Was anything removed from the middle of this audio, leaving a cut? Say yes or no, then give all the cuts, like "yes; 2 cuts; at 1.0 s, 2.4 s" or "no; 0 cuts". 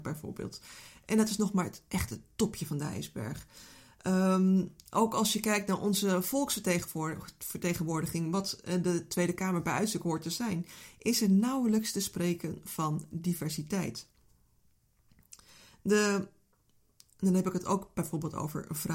no; 0 cuts